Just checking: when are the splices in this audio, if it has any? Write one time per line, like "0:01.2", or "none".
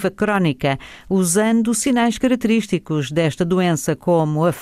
none